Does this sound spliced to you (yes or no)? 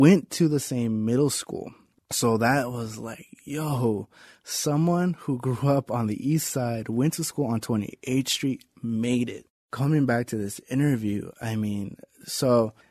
yes